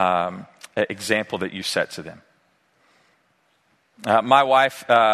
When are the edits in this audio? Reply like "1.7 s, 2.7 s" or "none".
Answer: none